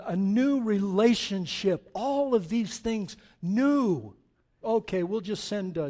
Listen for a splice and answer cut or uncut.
cut